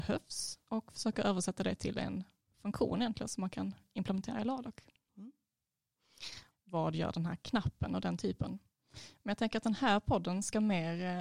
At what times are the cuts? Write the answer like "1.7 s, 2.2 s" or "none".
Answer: 5.1 s, 6.5 s